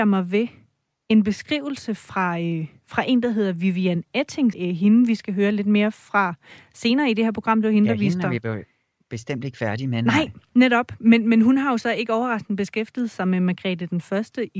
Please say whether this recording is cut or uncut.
cut